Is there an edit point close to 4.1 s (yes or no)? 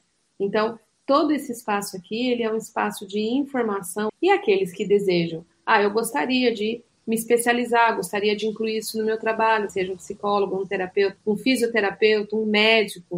yes